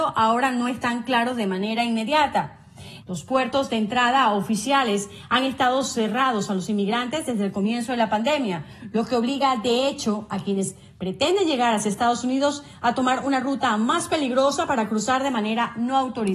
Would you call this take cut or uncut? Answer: cut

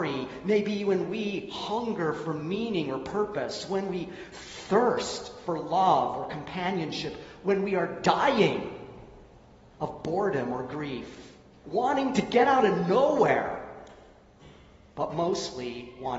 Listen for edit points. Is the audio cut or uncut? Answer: cut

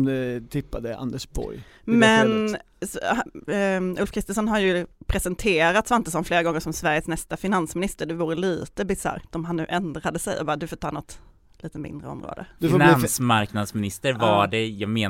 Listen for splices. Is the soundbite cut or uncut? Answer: cut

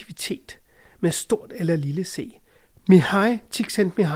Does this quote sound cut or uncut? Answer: cut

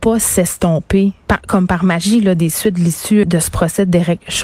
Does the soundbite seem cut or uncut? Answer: cut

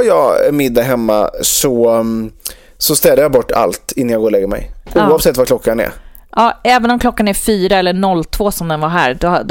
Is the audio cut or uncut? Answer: cut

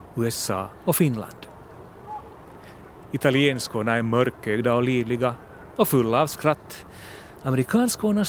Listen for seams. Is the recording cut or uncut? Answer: uncut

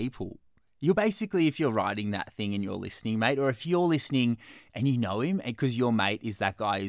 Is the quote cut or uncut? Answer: uncut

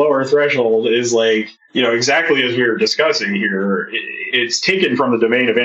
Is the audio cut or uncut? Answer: cut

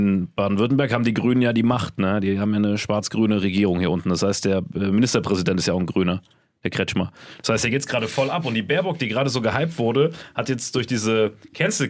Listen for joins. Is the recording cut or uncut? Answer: uncut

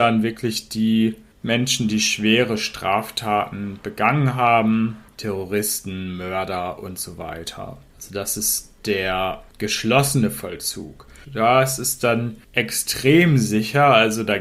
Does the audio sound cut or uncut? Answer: cut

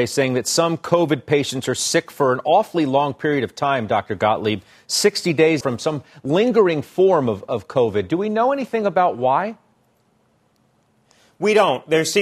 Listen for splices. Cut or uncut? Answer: cut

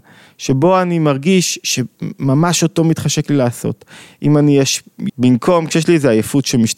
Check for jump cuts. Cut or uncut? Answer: cut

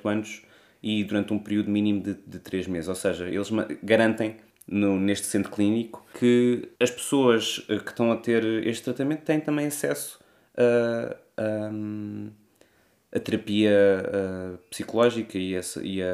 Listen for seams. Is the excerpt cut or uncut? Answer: uncut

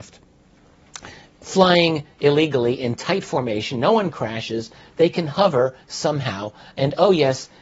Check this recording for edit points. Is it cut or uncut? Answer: uncut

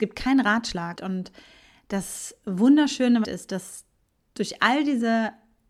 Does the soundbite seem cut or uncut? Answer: cut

